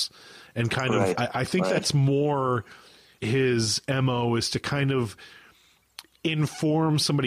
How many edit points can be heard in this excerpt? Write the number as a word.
two